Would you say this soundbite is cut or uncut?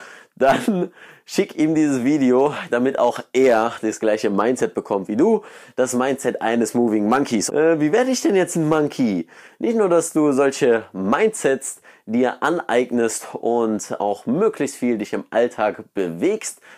cut